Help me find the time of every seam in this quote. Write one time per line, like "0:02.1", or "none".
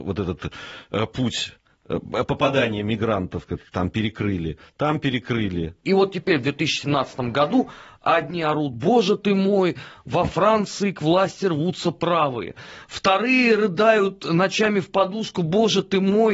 0:05.8

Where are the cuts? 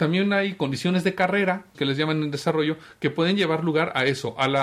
0:01.7

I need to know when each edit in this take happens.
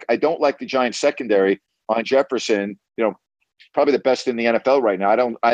0:02.9

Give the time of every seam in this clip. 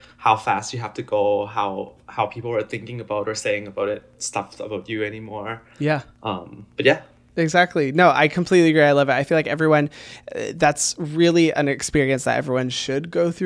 none

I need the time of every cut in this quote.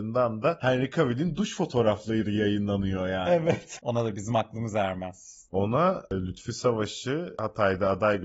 0:03.8

